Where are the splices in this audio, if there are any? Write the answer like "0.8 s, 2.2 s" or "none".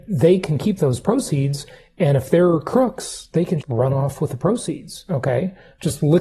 3.6 s